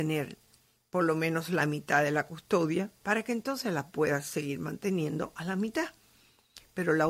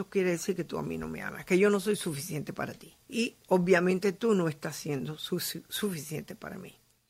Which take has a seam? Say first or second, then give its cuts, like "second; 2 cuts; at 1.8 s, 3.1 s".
second; 1 cut; at 3.0 s